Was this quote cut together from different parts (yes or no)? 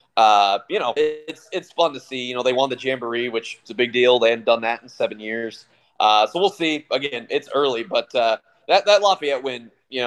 yes